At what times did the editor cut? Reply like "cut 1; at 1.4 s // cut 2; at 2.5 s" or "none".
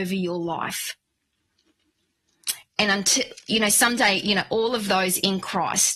none

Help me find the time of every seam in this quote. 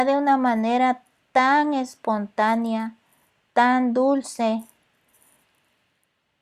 none

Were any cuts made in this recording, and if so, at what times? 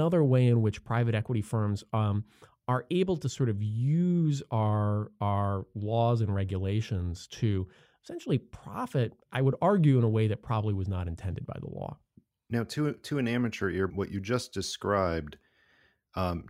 cut 1; at 13.9 s

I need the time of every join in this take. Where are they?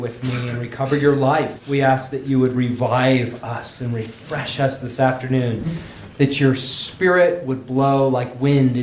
cut 1; at 1.6 s

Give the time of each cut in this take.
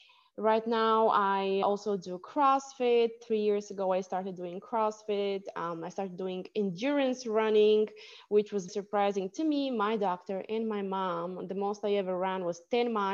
cut 1; at 1.6 s // cut 2; at 8.7 s

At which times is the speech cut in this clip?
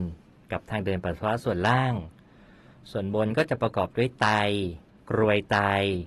none

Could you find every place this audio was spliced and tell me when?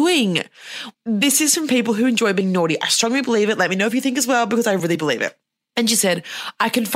cut 1; at 0.9 s

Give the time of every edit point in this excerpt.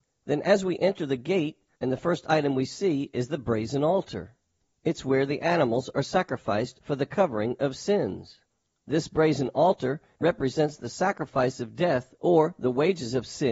cut 1; at 1.7 s

